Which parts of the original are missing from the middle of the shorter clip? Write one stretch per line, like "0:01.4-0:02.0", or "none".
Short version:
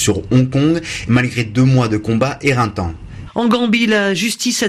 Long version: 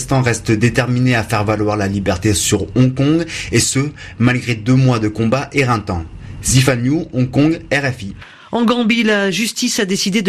0:03.5-0:04.2
0:06.4-0:08.4